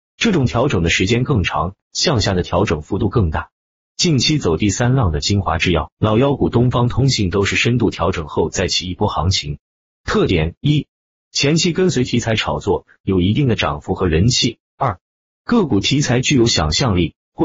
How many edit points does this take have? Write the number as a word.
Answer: zero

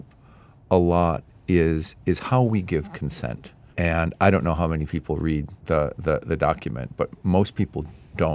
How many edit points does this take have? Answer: two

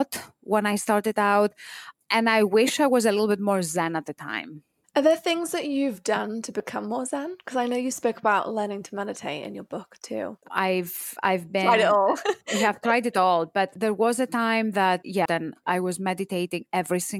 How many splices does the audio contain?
two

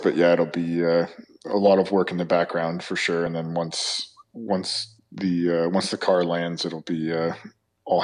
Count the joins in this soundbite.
zero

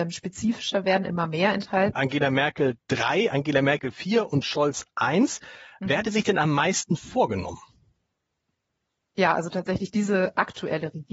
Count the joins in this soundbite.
one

